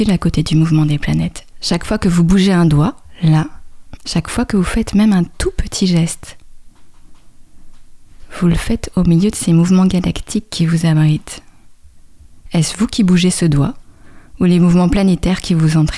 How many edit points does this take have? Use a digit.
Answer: 1